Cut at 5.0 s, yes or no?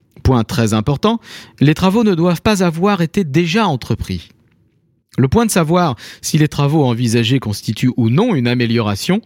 yes